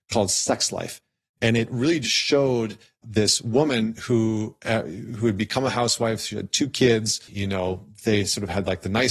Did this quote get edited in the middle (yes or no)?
yes